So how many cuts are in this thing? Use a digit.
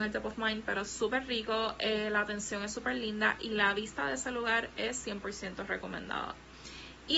0